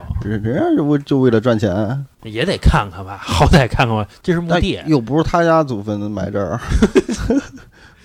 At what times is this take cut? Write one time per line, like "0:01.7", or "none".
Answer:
none